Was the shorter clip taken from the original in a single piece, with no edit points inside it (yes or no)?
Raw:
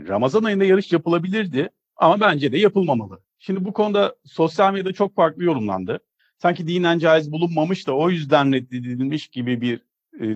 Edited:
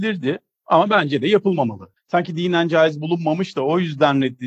no